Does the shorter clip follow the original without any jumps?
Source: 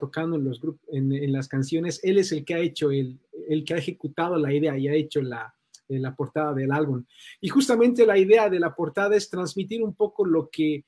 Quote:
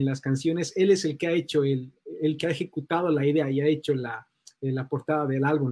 yes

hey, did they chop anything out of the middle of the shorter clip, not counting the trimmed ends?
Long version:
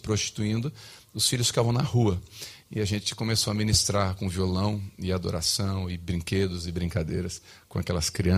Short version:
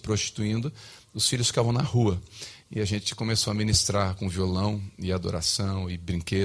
no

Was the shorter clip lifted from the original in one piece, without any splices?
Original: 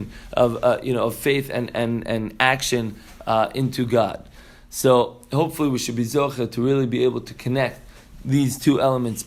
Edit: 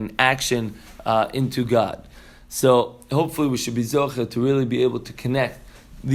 yes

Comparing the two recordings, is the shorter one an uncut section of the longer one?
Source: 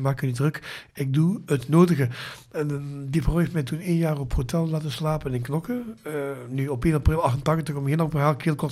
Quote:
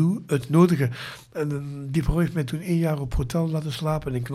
yes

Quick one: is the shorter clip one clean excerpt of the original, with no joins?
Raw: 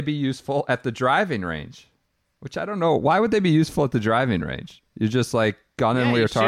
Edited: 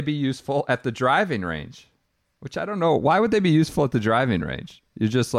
yes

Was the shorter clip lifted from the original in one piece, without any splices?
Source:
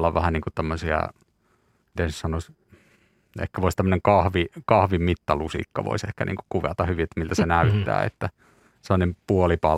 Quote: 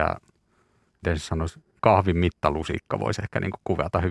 no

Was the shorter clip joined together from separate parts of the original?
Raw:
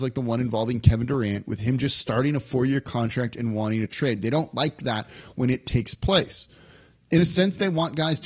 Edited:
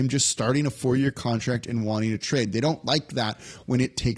no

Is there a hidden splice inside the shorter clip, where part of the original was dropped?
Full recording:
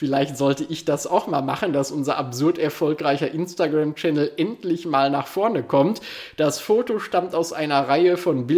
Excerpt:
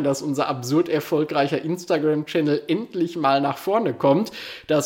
no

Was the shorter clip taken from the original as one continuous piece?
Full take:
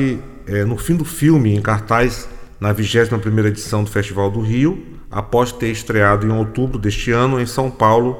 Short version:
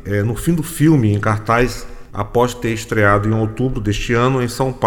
no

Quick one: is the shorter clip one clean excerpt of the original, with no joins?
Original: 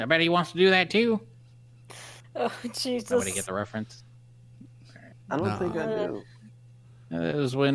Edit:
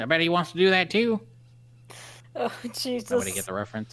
yes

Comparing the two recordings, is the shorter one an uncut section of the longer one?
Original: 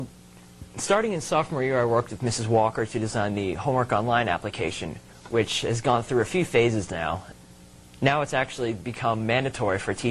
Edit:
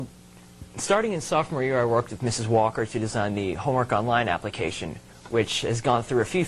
yes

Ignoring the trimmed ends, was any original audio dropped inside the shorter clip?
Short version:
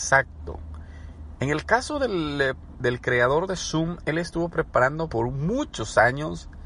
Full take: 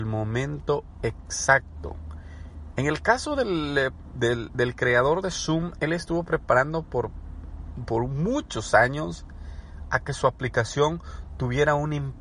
yes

